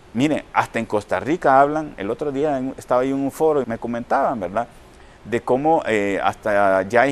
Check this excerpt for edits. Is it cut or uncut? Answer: cut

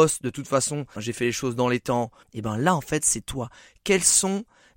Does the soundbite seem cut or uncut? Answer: cut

